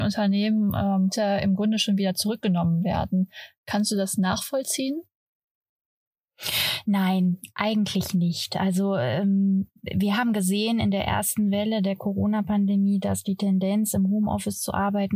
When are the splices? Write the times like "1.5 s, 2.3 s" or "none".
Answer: none